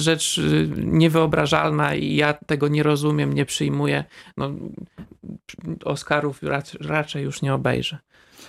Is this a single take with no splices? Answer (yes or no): yes